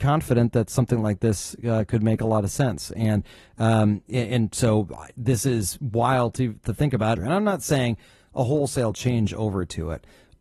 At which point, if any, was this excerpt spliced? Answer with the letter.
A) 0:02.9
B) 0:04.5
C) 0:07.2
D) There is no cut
C